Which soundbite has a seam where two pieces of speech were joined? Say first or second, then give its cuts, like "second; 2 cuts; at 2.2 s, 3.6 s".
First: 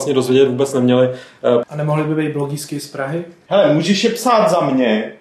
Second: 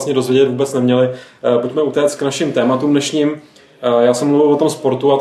first; 1 cut; at 1.6 s